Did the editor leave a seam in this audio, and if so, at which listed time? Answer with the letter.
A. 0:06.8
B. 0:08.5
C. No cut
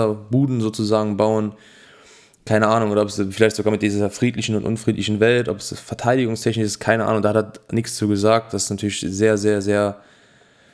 C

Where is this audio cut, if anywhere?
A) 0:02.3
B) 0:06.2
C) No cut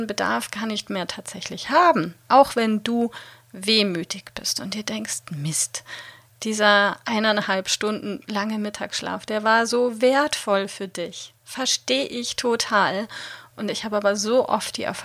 A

